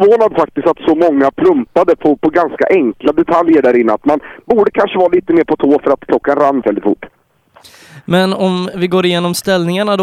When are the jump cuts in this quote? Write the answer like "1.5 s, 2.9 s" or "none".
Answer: 6.6 s